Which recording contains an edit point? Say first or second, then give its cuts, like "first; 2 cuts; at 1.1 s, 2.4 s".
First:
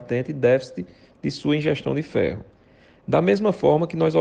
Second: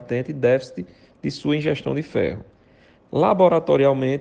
second; 1 cut; at 3.0 s